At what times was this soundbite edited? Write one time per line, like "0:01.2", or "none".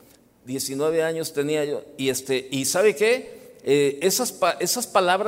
none